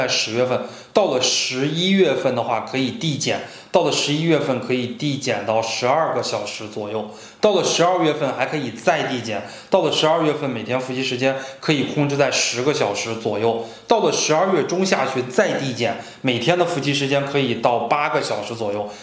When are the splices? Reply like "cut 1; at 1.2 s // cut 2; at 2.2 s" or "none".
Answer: none